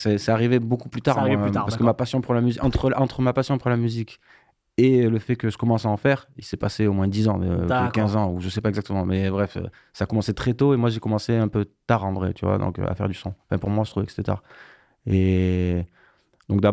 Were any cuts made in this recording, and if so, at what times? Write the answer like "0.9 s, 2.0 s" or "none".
none